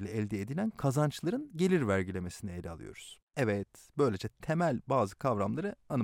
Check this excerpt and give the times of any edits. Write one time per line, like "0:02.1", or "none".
0:03.3